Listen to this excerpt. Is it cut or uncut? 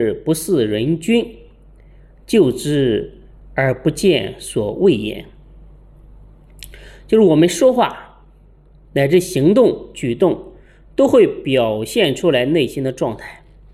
uncut